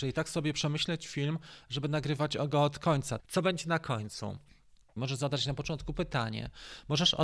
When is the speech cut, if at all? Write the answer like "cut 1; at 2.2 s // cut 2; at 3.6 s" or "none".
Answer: cut 1; at 3.2 s // cut 2; at 5.0 s